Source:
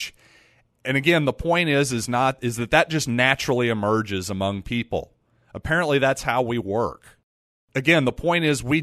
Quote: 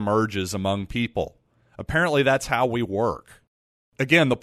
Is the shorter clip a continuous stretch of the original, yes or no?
yes